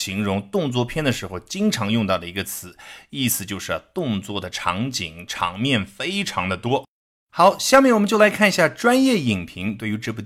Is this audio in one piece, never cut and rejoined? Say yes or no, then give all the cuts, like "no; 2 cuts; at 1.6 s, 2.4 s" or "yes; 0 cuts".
yes; 0 cuts